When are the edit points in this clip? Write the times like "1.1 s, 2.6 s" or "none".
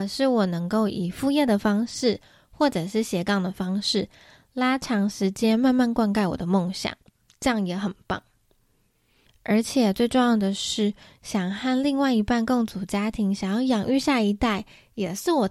none